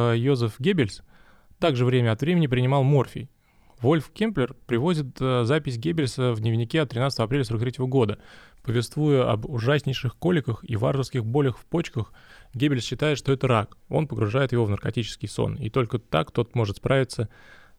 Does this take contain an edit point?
yes; 1 cut; at 13.8 s

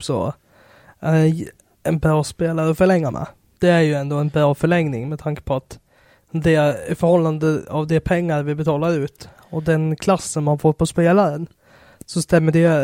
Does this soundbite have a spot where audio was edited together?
yes; 1 cut; at 3.6 s

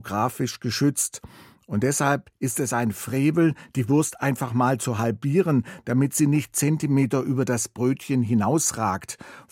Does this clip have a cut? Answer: no; 0 cuts

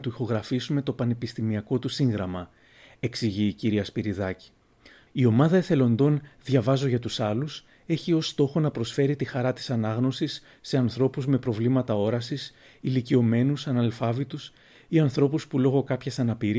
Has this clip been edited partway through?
yes; 1 cut; at 5.1 s

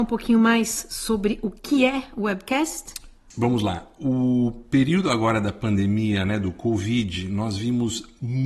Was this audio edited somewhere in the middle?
no; 0 cuts

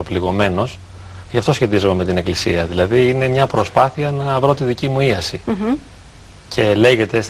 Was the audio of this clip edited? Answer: yes; 1 cut; at 1.2 s

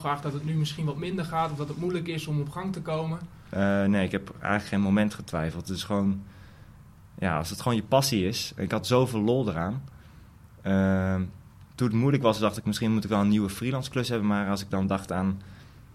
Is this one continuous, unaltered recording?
no; 1 cut; at 11.7 s

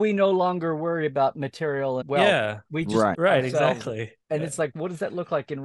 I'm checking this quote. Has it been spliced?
yes; 3 cuts; at 2.0 s, 3.1 s, 4.2 s

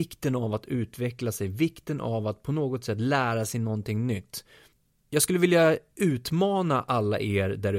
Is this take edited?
no; 0 cuts

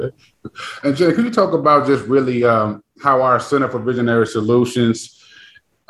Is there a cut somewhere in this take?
no; 0 cuts

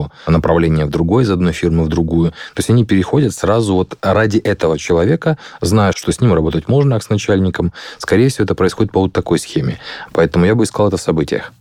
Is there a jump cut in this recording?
yes; 2 cuts; at 5.9 s, 10.1 s

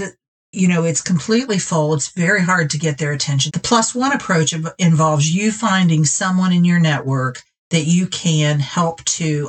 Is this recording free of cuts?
no; 1 cut; at 3.5 s

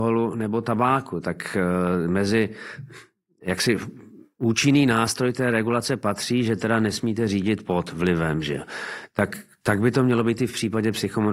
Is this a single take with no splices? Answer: yes; 0 cuts

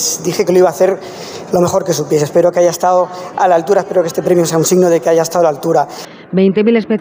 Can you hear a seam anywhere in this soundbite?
no; 0 cuts

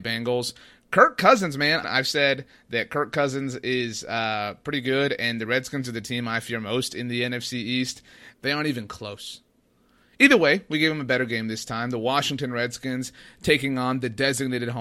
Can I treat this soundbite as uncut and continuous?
no; 2 cuts; at 1.8 s, 8.3 s

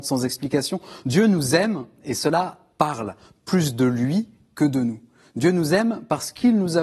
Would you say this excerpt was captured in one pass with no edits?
yes; 0 cuts

